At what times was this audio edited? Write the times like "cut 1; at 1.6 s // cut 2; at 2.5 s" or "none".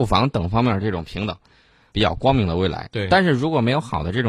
cut 1; at 1.9 s